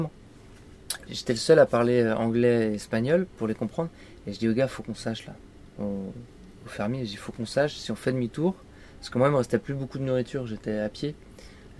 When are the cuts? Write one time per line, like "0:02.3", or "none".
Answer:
0:01.1